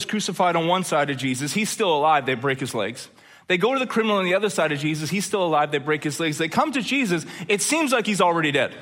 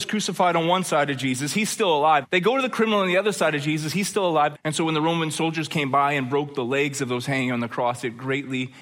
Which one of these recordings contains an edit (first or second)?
second